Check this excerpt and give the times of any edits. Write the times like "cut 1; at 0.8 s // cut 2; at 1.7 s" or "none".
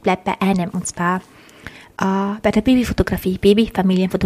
none